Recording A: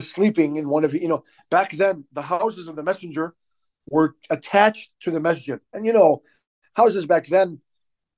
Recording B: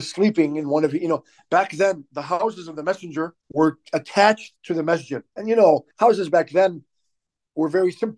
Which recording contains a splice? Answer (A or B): B